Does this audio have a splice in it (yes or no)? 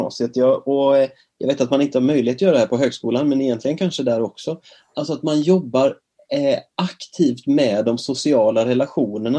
no